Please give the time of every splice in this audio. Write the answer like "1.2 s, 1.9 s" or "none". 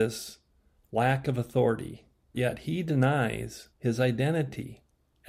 2.3 s, 3.7 s